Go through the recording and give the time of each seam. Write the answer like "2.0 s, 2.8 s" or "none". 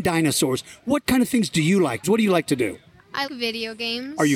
2.0 s, 3.3 s